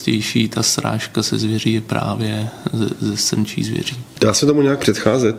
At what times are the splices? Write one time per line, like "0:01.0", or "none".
none